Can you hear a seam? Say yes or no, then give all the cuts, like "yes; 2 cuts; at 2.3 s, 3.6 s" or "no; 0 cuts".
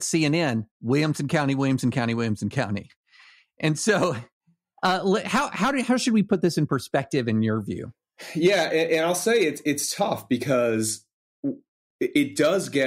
yes; 1 cut; at 11.2 s